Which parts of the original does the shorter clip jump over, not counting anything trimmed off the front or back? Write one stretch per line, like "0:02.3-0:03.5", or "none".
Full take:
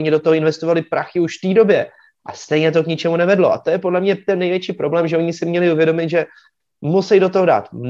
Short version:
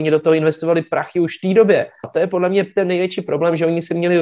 0:02.0-0:03.5